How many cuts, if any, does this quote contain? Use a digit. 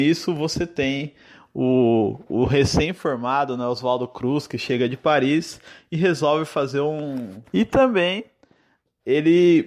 1